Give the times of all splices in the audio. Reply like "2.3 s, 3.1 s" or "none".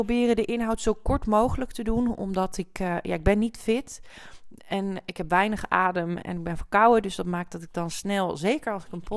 none